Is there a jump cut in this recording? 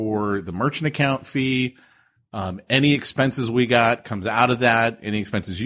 no; 0 cuts

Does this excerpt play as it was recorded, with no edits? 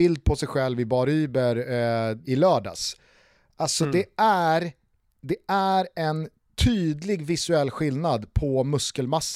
no; 1 cut; at 2.2 s

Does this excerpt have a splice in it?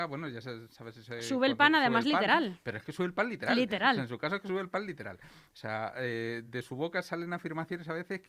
yes; 1 cut; at 6.4 s

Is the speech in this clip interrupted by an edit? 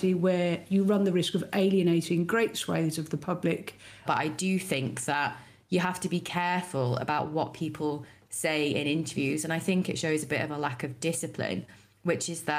yes; 1 cut; at 4.1 s

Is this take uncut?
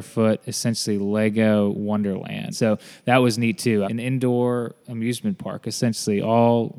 no; 2 cuts; at 2.5 s, 3.8 s

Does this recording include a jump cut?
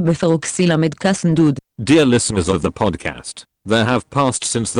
yes; 1 cut; at 1.7 s

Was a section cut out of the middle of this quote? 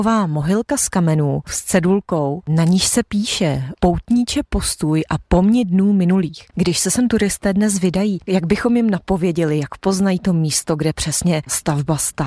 yes; 1 cut; at 6.5 s

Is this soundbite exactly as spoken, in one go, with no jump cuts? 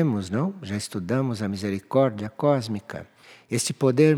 yes; 0 cuts

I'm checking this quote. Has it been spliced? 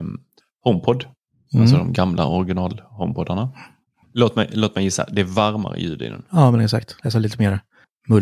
yes; 1 cut; at 4.0 s

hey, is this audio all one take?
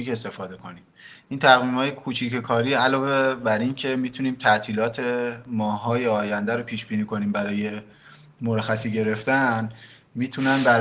yes; 0 cuts

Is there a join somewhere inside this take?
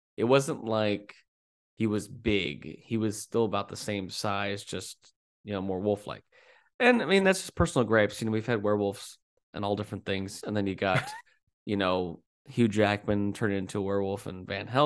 yes; 1 cut; at 10.4 s

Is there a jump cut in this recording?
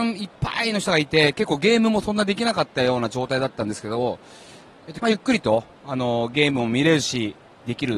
yes; 1 cut; at 5.0 s

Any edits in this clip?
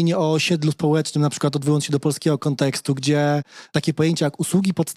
no; 0 cuts

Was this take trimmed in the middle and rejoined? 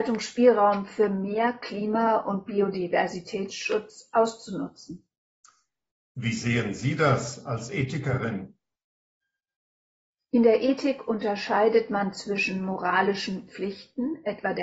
no; 0 cuts

